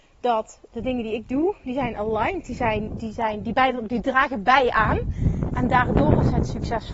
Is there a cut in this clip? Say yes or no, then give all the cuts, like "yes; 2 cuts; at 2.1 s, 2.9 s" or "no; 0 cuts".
no; 0 cuts